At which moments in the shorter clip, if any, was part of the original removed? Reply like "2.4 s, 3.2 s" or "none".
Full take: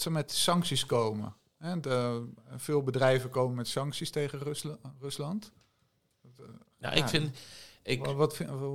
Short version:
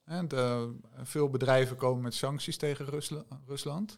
none